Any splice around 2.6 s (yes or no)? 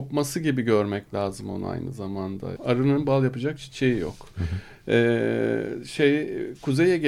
yes